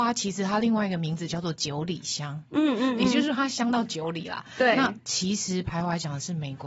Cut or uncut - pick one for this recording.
cut